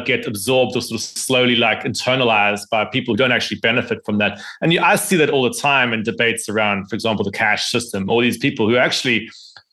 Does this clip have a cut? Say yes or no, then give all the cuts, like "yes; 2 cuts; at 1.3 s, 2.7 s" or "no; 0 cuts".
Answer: no; 0 cuts